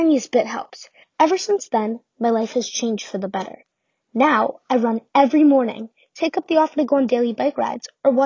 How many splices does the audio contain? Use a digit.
1